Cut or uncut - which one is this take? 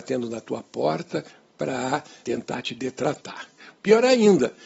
cut